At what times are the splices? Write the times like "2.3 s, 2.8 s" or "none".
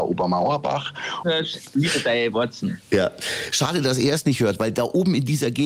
1.2 s